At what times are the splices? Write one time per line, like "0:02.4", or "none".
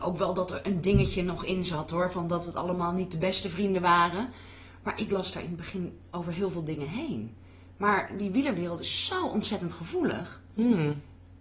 none